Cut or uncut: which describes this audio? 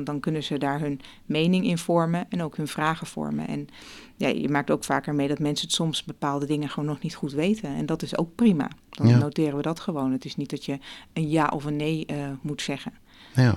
uncut